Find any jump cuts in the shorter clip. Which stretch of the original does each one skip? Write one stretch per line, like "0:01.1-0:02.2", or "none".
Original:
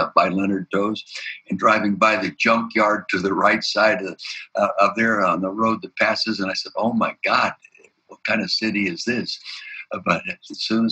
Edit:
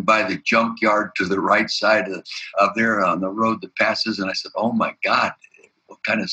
0:04.5-0:04.7

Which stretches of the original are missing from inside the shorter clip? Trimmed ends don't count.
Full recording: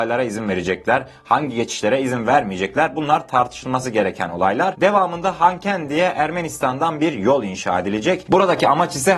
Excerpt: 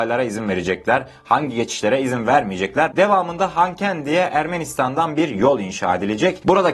0:02.9-0:04.8

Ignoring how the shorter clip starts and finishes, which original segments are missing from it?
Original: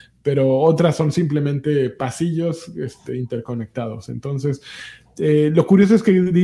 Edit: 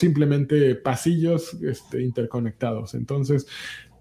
none

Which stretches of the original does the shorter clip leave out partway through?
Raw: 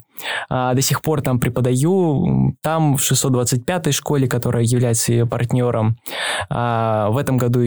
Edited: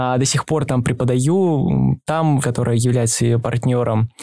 0:03.0-0:04.3

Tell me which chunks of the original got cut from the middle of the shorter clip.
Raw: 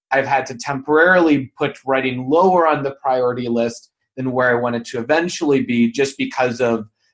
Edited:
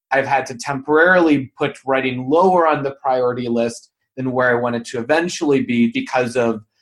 0:05.9-0:06.2

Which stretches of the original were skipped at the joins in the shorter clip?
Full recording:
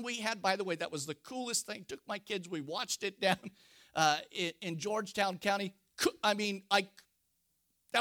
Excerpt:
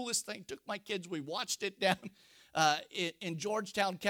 none

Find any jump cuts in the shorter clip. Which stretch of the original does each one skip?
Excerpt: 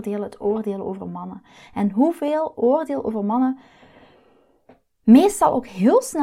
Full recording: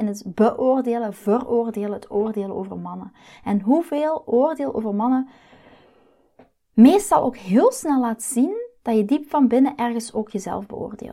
none

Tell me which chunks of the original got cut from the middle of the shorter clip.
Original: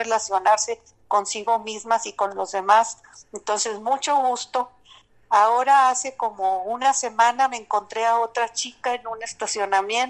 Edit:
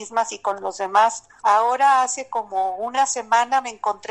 0:03.1-0:05.3

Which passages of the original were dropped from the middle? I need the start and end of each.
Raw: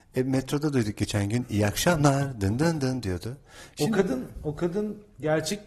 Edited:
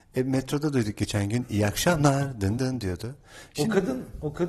0:02.6-0:02.8

